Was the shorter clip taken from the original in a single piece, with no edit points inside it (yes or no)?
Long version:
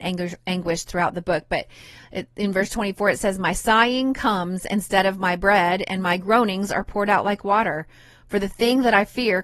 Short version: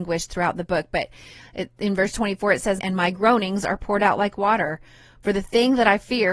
no